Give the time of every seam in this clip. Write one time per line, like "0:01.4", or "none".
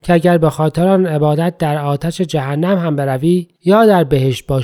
0:03.5